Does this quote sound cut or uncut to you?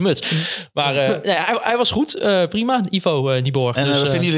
uncut